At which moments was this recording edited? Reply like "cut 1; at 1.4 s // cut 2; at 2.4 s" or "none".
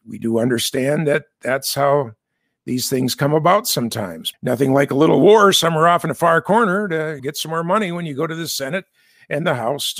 cut 1; at 4.3 s // cut 2; at 7.2 s